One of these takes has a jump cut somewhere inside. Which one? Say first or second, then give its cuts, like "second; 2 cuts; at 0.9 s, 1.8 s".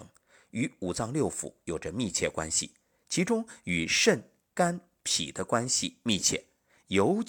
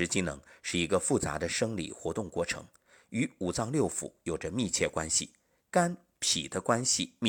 second; 1 cut; at 5.6 s